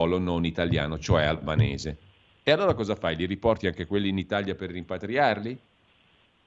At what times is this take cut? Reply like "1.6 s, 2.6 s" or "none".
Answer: none